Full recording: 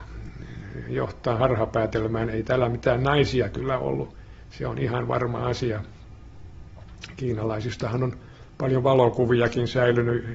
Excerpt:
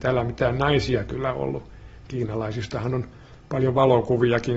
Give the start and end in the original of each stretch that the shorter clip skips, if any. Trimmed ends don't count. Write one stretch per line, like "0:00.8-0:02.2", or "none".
0:04.5-0:07.2